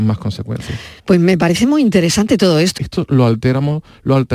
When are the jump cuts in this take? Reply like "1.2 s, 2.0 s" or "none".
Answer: 1.0 s, 2.8 s